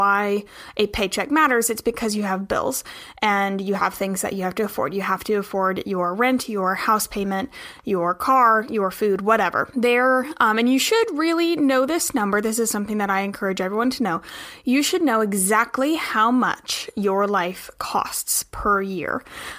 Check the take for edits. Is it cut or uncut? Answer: uncut